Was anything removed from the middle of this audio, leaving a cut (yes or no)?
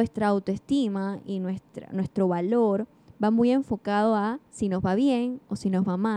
yes